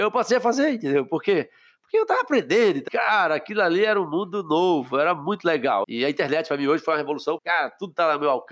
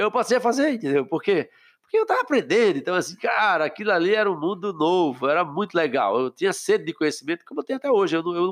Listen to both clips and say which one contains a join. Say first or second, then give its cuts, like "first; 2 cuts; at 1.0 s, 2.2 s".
first; 3 cuts; at 2.9 s, 5.8 s, 7.4 s